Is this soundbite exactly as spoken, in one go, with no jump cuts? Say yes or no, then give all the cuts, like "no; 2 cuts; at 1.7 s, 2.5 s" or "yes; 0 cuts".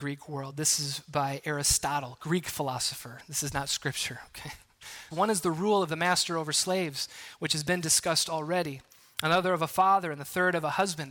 no; 1 cut; at 5.1 s